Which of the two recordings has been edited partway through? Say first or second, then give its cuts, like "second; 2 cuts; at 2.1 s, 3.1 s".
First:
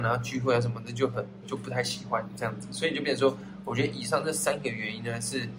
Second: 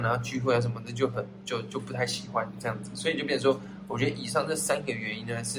first; 1 cut; at 1.4 s